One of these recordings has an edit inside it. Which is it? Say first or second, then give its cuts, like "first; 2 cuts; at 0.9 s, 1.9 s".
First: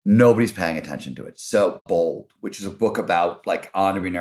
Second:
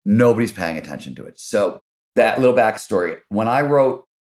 first; 1 cut; at 1.9 s